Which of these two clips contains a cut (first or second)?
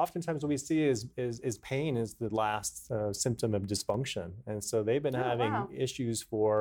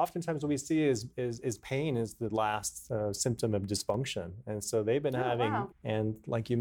second